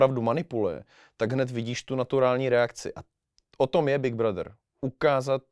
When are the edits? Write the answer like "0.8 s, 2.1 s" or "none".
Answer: none

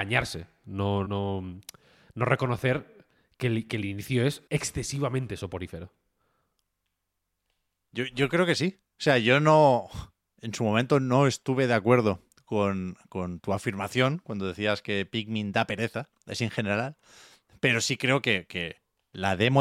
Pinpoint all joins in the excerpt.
1.1 s, 4.5 s

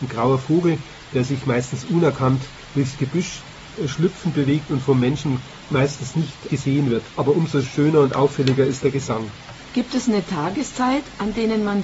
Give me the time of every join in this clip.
none

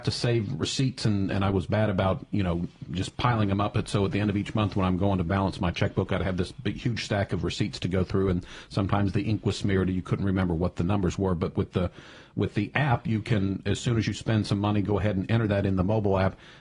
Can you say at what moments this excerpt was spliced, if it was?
none

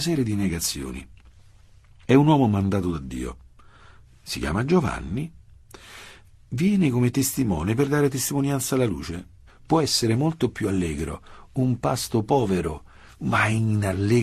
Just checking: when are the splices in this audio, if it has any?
9.5 s

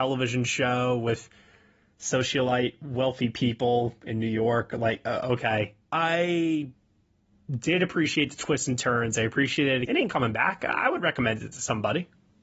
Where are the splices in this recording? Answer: 5.9 s, 9.8 s

